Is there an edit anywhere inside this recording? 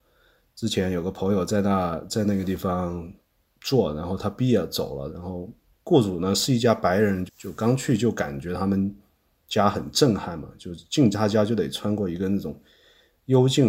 yes; 2 cuts; at 5.1 s, 7.3 s

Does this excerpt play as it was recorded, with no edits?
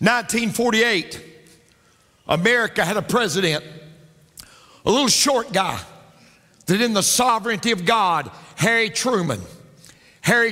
yes; 0 cuts

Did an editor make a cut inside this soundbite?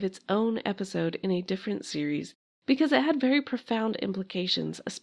no; 0 cuts

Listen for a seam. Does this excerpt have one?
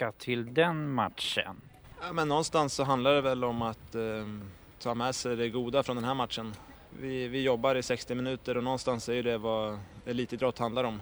no; 0 cuts

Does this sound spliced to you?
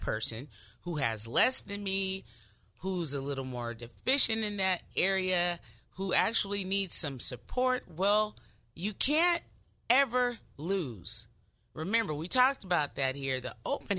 no; 0 cuts

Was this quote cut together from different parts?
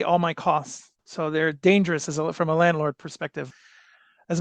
yes; 1 cut; at 1.0 s

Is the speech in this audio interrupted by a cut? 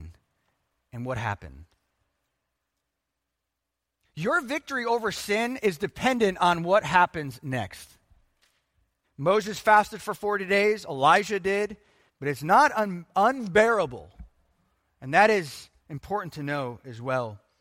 yes; 3 cuts; at 9.0 s, 12.1 s, 15.8 s

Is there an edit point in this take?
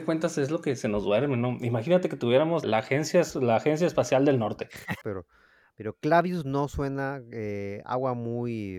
yes; 2 cuts; at 2.6 s, 5.0 s

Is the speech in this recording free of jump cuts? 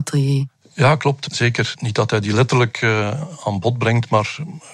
yes; 0 cuts

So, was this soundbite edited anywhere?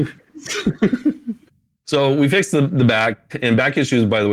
no; 0 cuts

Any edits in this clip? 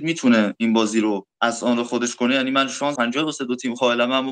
yes; 1 cut; at 3.0 s

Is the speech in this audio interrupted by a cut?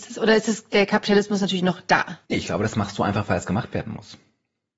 yes; 1 cut; at 2.2 s

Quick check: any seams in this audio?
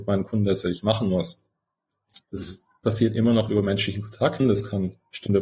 yes; 1 cut; at 4.4 s

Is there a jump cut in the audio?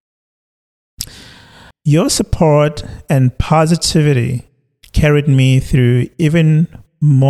yes; 1 cut; at 1.7 s

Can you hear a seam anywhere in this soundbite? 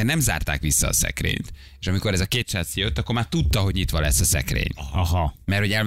no; 0 cuts

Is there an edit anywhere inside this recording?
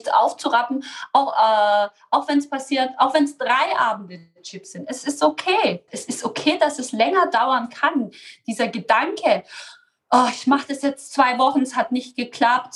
yes; 1 cut; at 5.9 s

